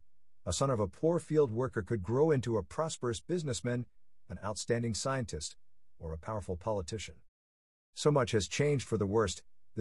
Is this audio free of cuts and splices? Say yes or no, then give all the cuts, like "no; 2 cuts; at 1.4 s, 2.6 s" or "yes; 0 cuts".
no; 1 cut; at 7.8 s